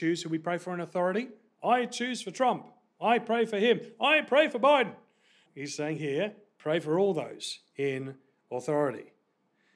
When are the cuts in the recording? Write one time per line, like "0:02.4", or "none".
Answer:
0:05.5